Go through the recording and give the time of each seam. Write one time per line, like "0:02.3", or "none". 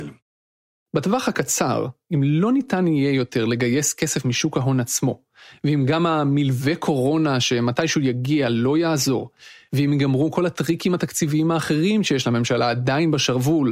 none